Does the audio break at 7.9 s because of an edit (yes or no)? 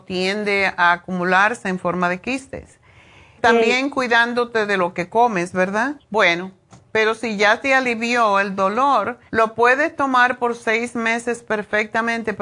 no